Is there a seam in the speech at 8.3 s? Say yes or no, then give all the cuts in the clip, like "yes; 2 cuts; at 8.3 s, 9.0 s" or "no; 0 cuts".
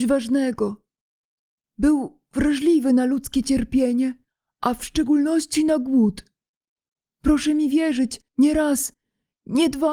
yes; 1 cut; at 8.3 s